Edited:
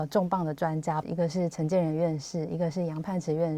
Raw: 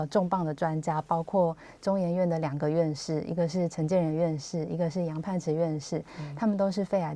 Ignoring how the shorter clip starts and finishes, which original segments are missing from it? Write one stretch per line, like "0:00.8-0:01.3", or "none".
0:01.0-0:03.2